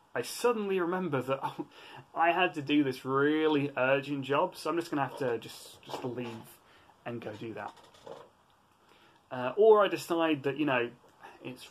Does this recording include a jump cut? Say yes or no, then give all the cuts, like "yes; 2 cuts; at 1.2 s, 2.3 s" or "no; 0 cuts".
no; 0 cuts